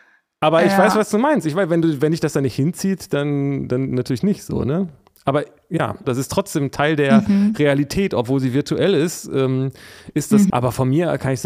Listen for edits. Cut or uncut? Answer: cut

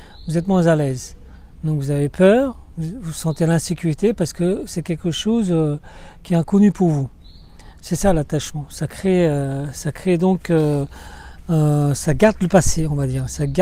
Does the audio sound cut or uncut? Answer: uncut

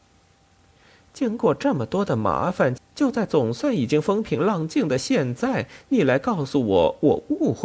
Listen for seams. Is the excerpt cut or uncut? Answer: cut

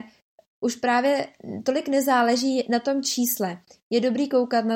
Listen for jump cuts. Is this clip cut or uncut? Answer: uncut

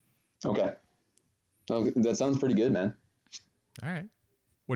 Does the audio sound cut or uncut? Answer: uncut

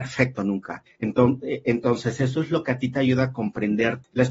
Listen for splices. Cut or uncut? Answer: uncut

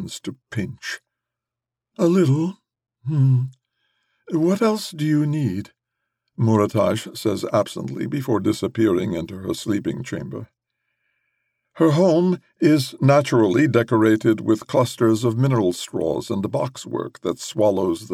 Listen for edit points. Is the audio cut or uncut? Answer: uncut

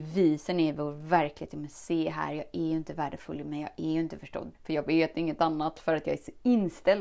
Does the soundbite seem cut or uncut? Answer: cut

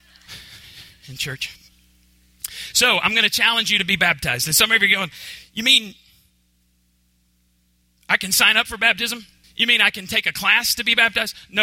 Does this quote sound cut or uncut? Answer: cut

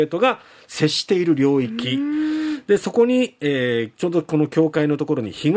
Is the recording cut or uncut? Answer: uncut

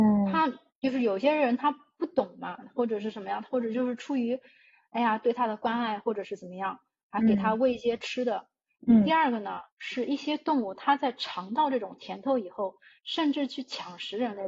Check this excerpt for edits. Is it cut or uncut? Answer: cut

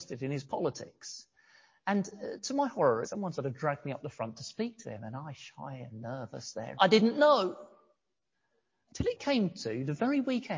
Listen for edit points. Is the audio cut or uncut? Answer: cut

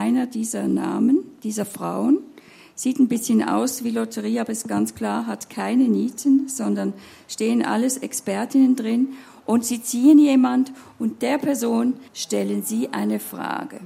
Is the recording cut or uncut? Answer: cut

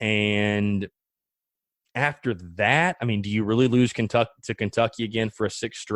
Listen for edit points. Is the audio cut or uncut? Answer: uncut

